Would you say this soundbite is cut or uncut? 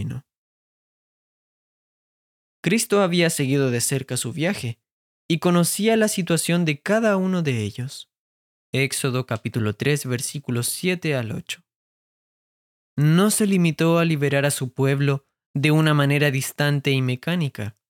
cut